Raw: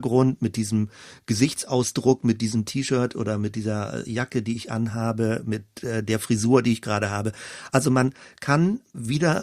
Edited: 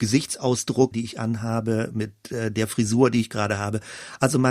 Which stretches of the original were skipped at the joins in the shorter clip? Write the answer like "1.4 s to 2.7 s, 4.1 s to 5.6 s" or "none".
2.2 s to 4.4 s